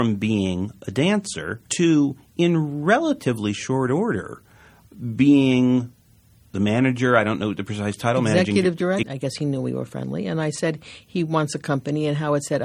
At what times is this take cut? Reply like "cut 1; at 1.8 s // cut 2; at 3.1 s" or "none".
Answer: cut 1; at 1.7 s // cut 2; at 9.0 s